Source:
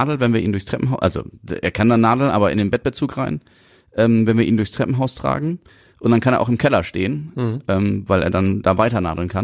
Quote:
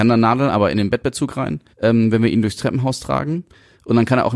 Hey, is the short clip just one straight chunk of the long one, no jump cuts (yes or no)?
no